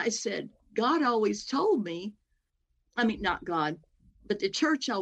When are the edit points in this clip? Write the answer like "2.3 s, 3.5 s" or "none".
none